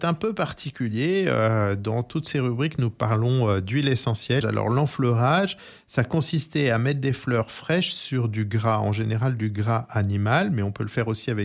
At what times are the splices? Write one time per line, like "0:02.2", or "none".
0:04.4